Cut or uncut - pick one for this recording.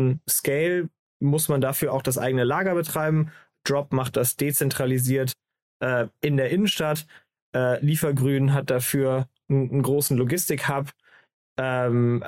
uncut